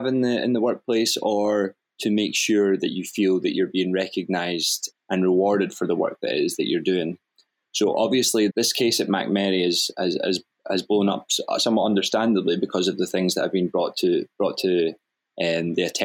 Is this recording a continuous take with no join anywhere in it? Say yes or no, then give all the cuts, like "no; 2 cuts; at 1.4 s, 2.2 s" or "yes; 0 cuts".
no; 1 cut; at 8.5 s